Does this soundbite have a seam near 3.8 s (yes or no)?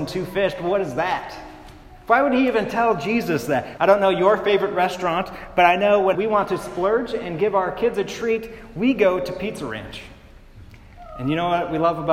yes